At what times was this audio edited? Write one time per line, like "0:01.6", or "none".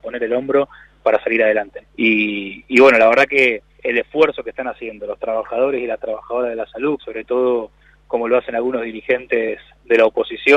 0:01.8
0:03.7
0:07.0